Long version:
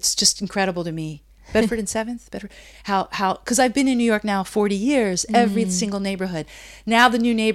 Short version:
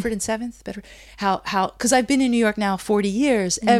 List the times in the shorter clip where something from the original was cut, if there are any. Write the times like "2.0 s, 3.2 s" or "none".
none